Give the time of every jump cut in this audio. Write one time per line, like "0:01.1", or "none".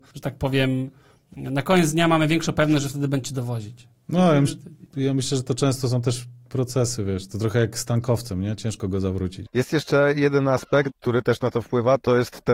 0:09.5
0:10.9